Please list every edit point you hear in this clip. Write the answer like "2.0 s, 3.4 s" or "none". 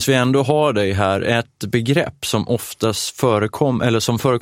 none